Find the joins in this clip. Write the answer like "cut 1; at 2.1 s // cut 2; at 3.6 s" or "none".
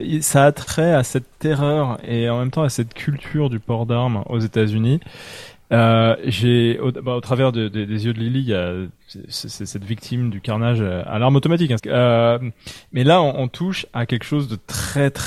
cut 1; at 11.8 s